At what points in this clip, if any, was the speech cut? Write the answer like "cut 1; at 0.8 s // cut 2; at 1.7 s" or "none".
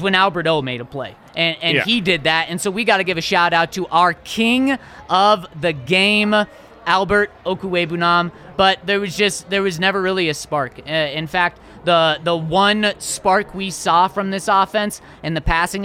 cut 1; at 8.5 s